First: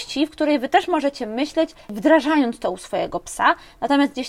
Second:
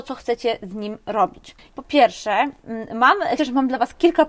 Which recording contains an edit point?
second; 2 cuts; at 1.7 s, 3.4 s

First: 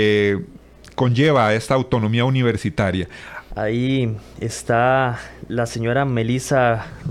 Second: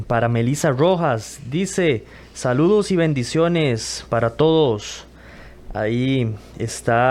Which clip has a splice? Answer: first; 1 cut; at 3.5 s

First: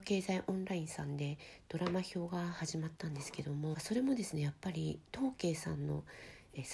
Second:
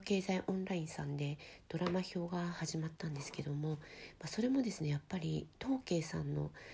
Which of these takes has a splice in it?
first; 1 cut; at 3.7 s

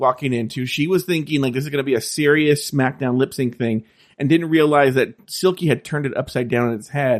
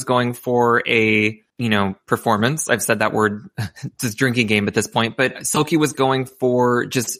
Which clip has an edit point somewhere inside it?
second; 1 cut; at 1.5 s

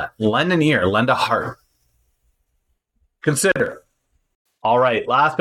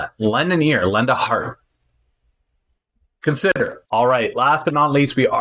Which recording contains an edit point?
second; 1 cut; at 3.8 s

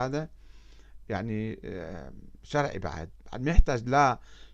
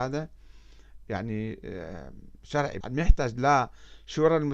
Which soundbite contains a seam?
second; 1 cut; at 2.8 s

